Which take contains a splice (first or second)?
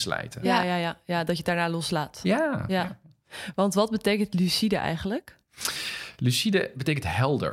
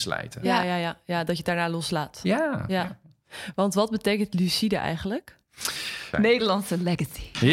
second